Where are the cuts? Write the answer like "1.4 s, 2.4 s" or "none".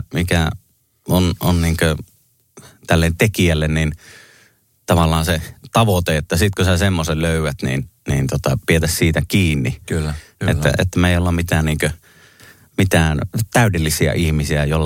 10.4 s